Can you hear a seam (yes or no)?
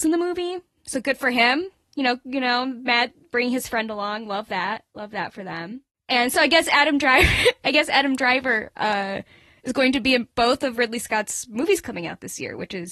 no